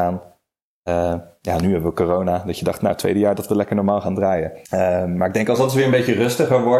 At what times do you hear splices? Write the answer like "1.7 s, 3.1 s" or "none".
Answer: 4.7 s